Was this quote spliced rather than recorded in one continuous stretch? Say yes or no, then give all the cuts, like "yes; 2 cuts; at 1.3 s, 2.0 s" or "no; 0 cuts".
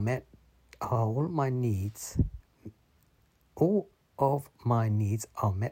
no; 0 cuts